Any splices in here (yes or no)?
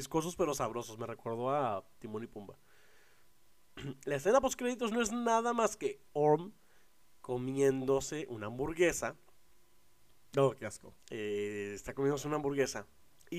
yes